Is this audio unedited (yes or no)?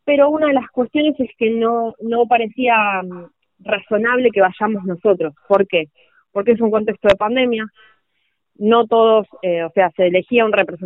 yes